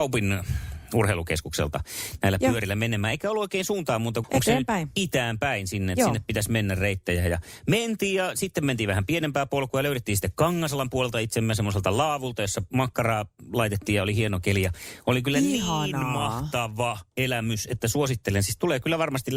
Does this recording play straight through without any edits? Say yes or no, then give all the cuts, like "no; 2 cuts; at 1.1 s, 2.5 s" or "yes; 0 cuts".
no; 1 cut; at 4.2 s